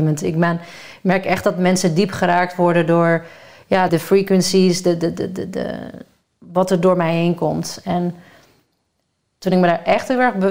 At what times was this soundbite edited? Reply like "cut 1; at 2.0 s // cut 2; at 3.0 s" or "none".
cut 1; at 3.9 s